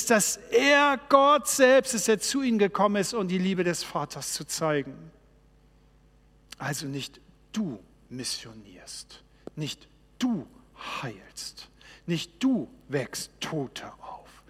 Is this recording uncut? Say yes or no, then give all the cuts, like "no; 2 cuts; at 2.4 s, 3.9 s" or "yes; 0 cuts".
no; 1 cut; at 6.5 s